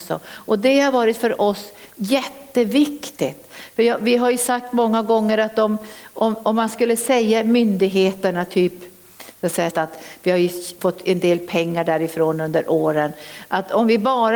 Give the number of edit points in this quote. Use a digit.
2